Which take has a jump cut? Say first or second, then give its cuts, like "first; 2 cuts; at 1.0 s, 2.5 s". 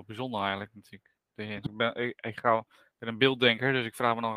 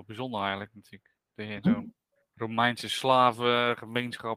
first; 1 cut; at 1.7 s